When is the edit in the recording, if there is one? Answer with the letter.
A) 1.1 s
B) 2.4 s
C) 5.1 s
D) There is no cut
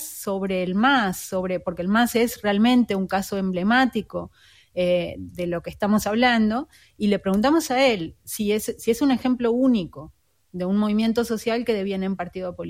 D